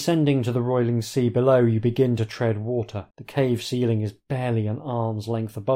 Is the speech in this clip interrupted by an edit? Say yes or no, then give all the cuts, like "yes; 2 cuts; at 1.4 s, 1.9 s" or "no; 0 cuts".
yes; 1 cut; at 3.1 s